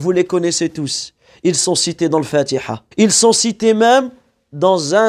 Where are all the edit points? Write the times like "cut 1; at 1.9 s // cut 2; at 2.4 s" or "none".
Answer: cut 1; at 2.9 s